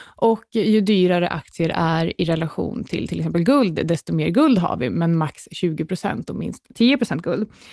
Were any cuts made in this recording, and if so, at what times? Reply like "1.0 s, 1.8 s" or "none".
none